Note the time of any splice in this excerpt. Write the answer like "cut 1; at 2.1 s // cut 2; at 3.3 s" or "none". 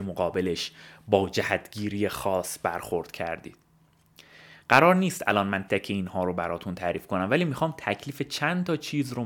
cut 1; at 5.7 s